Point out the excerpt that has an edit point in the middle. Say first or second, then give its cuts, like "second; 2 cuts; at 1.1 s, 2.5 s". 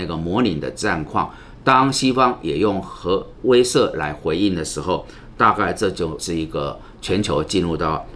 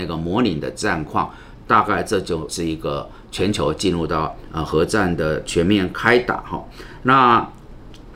second; 1 cut; at 1.6 s